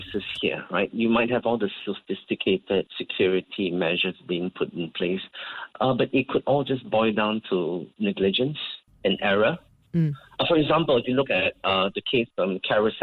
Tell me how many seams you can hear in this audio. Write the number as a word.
zero